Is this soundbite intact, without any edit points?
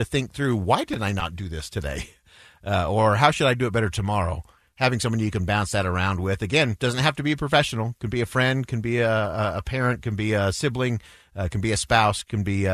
yes; 0 cuts

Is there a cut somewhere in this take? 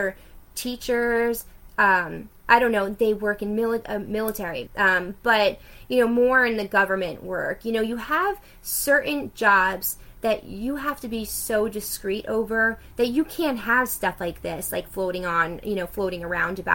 yes; 1 cut; at 4.7 s

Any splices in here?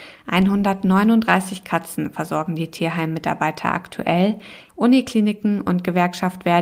yes; 1 cut; at 4.7 s

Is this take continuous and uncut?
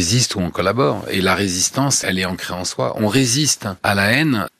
yes; 0 cuts

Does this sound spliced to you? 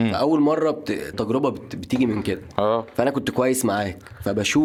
yes; 1 cut; at 1.1 s

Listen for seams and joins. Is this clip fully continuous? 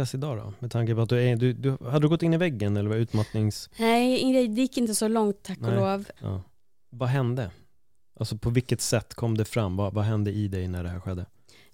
no; 1 cut; at 6.2 s

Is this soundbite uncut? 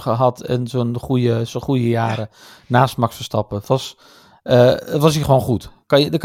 yes; 0 cuts

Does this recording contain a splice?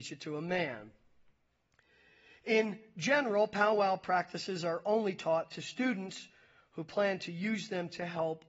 no; 0 cuts

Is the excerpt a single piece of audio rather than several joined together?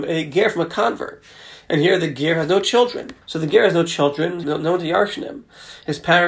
no; 2 cuts; at 3.2 s, 4.4 s

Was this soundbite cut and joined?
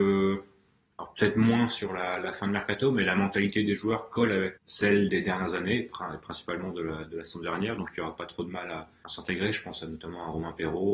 yes; 1 cut; at 4.6 s

